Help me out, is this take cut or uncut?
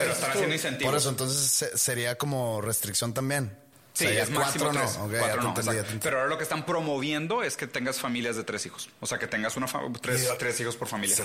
uncut